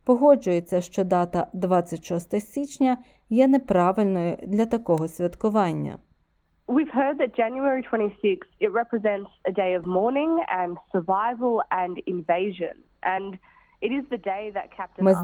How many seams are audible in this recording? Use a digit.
0